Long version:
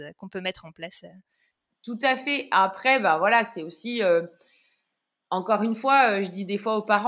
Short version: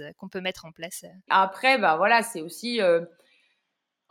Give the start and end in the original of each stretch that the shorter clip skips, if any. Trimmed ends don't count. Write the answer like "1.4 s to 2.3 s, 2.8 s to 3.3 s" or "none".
1.3 s to 2.5 s